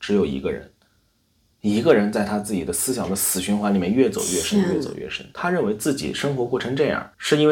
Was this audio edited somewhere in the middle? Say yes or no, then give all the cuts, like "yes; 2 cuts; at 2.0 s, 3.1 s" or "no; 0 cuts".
no; 0 cuts